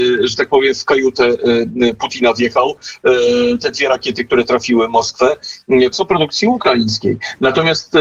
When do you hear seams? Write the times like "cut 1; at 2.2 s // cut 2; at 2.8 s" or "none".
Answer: cut 1; at 5.9 s